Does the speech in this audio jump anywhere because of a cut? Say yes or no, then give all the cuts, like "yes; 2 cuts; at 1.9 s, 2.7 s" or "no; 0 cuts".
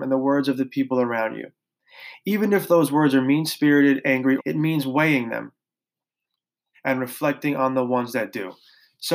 yes; 2 cuts; at 4.4 s, 6.7 s